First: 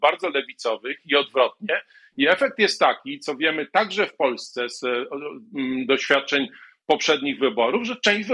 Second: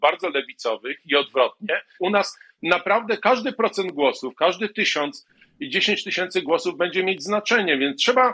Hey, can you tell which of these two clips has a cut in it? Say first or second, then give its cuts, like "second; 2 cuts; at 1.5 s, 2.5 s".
second; 1 cut; at 2.0 s